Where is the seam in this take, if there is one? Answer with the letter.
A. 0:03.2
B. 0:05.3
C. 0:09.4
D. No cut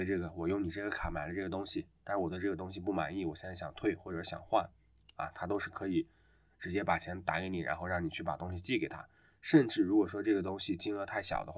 D